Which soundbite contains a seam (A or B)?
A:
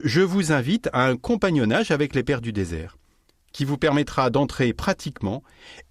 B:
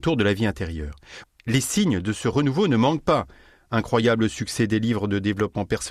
B